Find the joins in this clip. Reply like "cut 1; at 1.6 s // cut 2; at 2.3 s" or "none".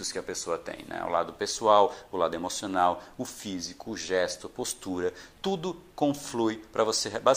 none